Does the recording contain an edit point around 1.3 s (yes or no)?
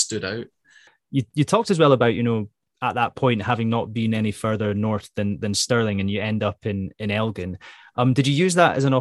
no